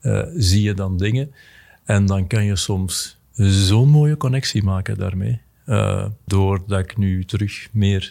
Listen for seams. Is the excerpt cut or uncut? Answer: cut